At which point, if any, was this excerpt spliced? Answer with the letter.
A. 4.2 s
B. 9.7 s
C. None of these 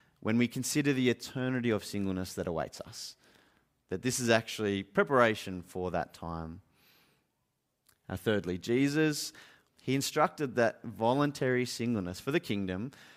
B